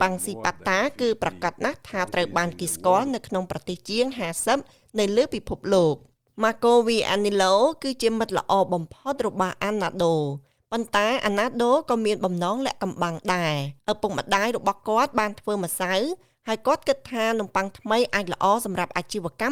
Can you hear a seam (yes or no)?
yes